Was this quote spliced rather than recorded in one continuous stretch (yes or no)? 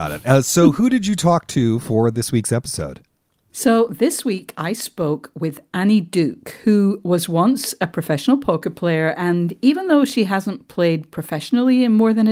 no